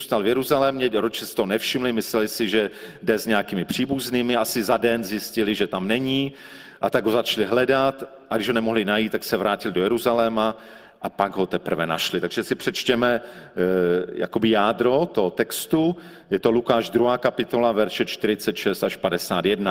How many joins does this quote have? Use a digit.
0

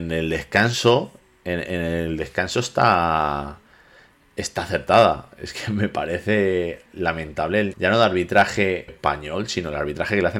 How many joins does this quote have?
2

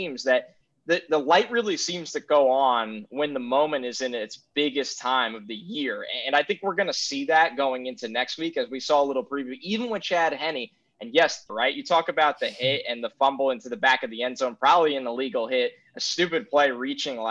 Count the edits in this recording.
1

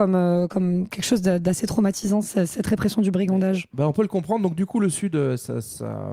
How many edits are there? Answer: 0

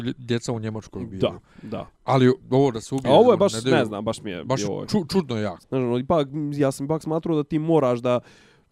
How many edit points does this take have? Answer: 1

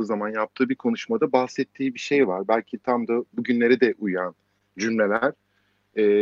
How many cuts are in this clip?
0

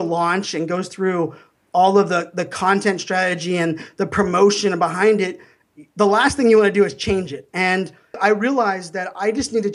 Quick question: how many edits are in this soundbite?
1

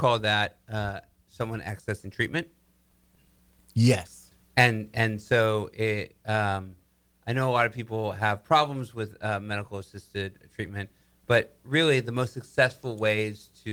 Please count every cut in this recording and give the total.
0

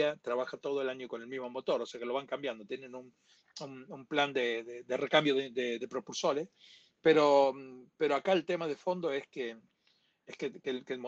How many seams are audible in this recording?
1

